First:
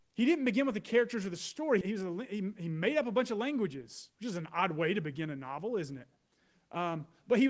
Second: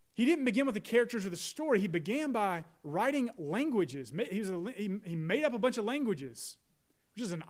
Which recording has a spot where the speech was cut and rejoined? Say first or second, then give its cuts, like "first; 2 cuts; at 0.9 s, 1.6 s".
first; 2 cuts; at 1.8 s, 4.1 s